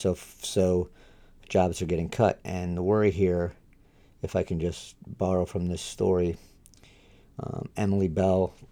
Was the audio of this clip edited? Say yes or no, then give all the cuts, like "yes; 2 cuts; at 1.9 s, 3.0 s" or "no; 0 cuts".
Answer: no; 0 cuts